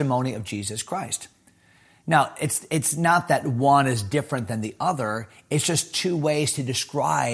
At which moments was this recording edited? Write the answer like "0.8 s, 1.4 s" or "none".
none